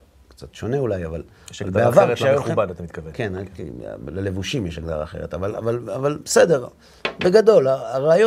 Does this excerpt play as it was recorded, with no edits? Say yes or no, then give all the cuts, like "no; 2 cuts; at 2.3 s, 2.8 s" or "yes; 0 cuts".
yes; 0 cuts